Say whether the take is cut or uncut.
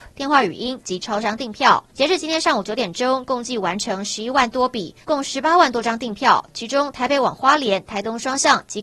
cut